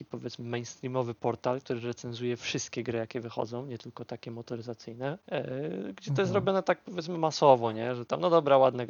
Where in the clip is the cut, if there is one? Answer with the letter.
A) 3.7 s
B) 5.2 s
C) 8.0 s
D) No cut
B